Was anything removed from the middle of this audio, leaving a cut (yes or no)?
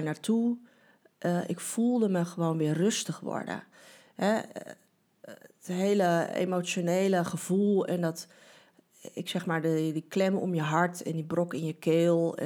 no